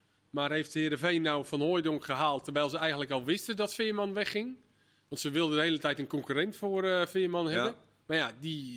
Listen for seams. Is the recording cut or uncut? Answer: uncut